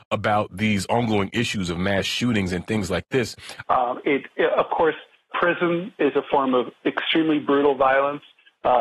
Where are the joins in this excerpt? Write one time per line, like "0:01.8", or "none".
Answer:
0:03.6
0:05.3